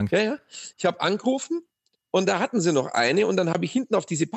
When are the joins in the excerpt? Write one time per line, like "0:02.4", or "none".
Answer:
none